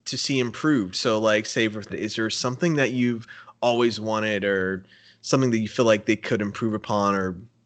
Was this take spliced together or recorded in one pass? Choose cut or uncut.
cut